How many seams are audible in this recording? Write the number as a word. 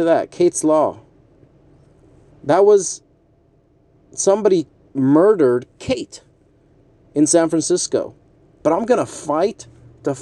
one